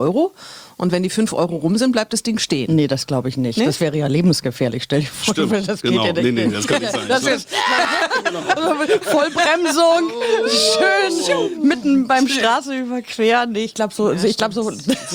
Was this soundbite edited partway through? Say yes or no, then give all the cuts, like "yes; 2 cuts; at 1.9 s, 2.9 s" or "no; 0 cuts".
no; 0 cuts